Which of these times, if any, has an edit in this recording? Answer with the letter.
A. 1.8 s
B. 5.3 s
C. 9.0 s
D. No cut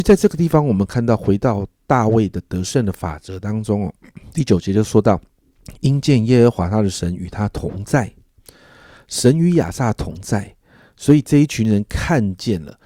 B